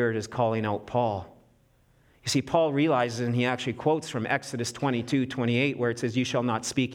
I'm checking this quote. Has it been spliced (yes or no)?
no